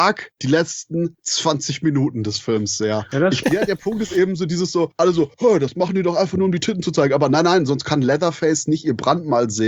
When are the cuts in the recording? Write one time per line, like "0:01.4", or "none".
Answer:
0:03.4

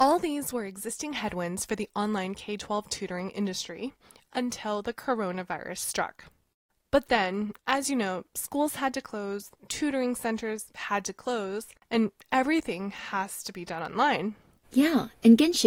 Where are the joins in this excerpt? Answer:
0:14.6

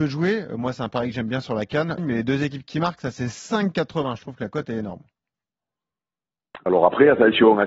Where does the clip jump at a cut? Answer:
0:02.0

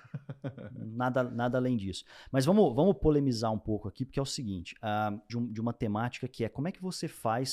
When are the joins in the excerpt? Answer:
0:05.3

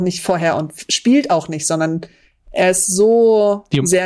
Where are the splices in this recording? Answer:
none

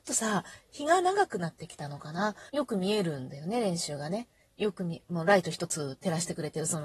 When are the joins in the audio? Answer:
0:02.5

